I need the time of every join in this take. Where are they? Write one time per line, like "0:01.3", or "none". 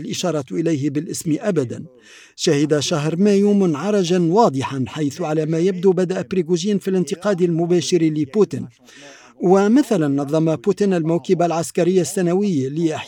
none